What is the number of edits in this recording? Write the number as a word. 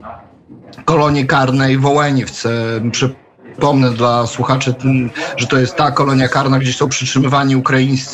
zero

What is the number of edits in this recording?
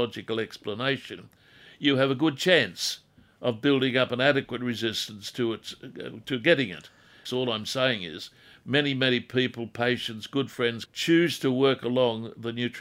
two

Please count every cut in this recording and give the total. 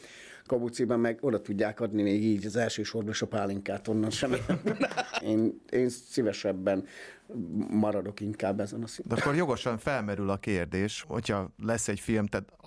one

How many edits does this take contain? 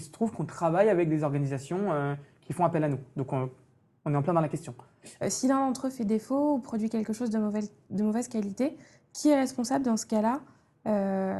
one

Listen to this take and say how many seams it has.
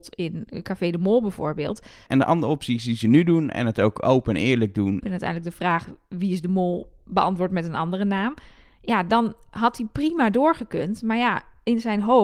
two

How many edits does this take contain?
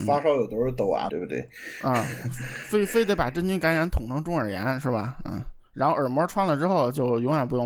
one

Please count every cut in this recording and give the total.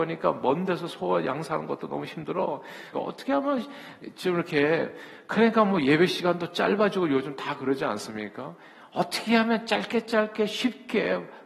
one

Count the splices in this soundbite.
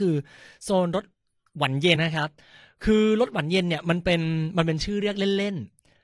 one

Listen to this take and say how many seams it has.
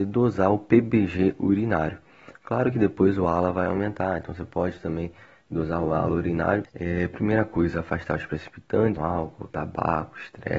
two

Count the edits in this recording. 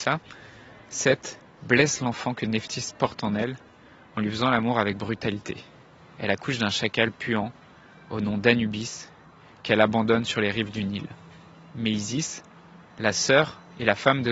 zero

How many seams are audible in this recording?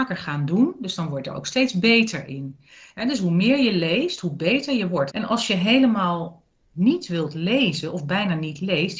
one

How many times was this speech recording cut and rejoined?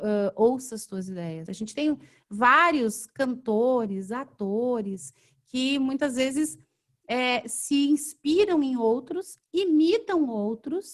one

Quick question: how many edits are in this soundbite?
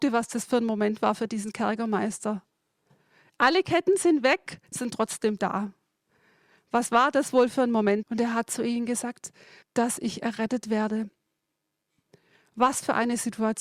three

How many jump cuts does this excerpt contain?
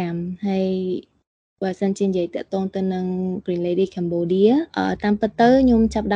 one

